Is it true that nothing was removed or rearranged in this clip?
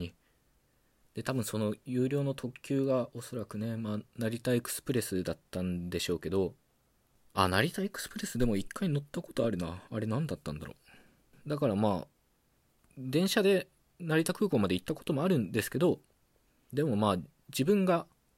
yes; 0 cuts

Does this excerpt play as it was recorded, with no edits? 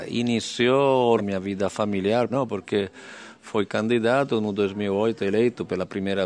no; 2 cuts; at 1.2 s, 2.3 s

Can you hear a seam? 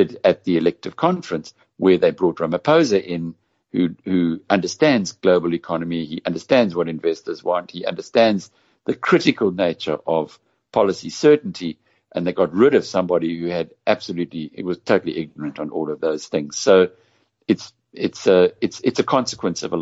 no; 0 cuts

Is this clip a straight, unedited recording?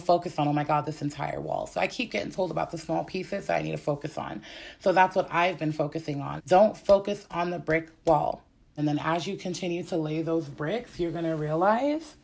no; 2 cuts; at 6.4 s, 8.8 s

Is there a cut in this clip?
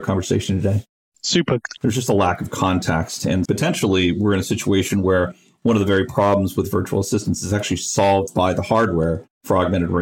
yes; 2 cuts; at 1.8 s, 3.5 s

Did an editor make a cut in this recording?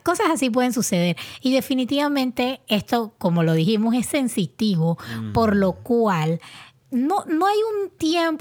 no; 0 cuts

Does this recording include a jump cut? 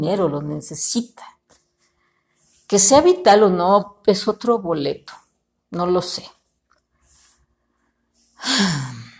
no; 0 cuts

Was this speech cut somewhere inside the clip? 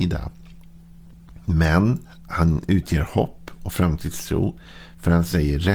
no; 0 cuts

